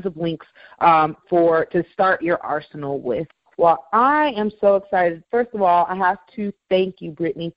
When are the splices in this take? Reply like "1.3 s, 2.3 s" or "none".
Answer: none